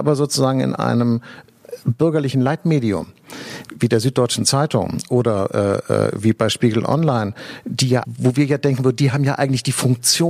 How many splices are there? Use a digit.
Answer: 1